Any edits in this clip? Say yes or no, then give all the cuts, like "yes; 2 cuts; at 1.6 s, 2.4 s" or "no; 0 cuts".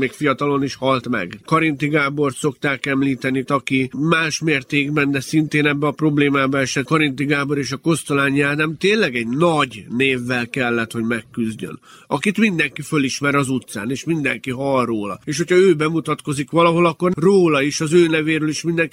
yes; 2 cuts; at 1.4 s, 3.5 s